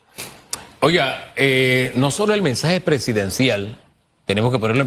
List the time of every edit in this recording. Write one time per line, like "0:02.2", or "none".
none